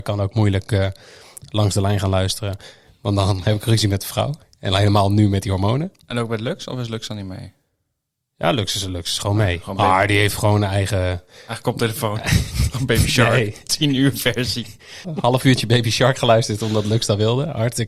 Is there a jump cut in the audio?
yes; 1 cut; at 15.0 s

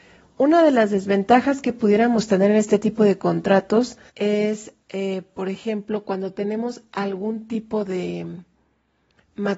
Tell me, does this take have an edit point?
yes; 1 cut; at 4.1 s

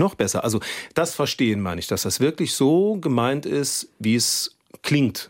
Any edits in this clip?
no; 0 cuts

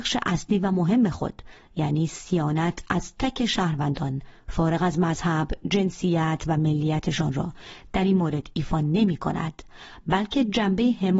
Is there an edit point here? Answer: yes; 1 cut; at 3.2 s

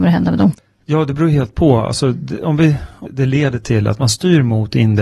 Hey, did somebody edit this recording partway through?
yes; 1 cut; at 3.1 s

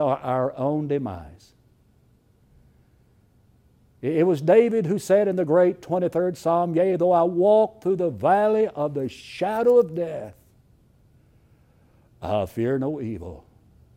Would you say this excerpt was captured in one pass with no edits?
yes; 0 cuts

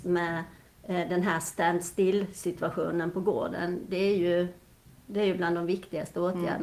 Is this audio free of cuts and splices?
yes; 0 cuts

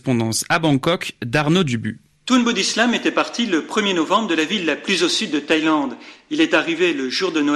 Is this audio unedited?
yes; 0 cuts

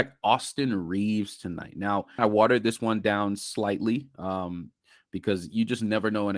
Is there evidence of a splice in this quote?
yes; 1 cut; at 2.2 s

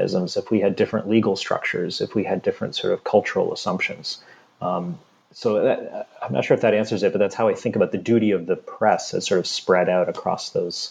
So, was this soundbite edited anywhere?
no; 0 cuts

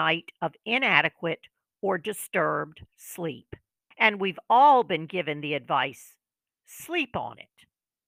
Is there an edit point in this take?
yes; 1 cut; at 3.9 s

